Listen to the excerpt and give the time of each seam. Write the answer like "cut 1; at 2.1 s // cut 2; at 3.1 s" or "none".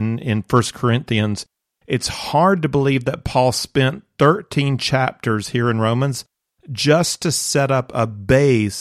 none